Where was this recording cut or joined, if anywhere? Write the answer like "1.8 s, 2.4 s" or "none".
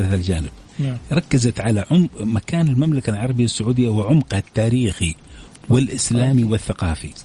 none